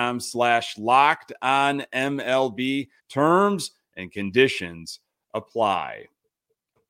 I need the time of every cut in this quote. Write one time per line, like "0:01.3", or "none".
0:03.0